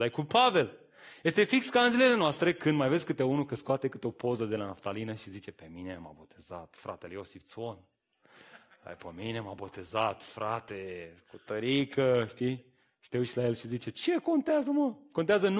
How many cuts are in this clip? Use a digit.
0